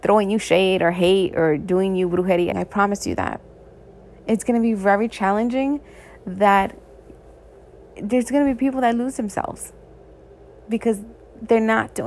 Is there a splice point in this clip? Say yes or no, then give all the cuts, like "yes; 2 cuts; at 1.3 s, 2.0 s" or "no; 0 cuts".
yes; 1 cut; at 2.5 s